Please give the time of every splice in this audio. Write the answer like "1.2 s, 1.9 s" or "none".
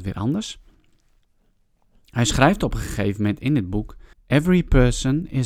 4.1 s